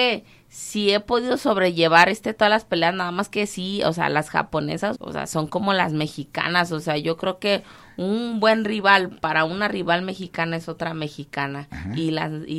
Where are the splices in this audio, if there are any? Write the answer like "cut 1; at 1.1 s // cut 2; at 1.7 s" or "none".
cut 1; at 4.9 s